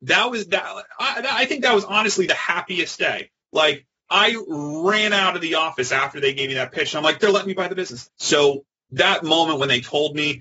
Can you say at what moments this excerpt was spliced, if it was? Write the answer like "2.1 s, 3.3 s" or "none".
8.1 s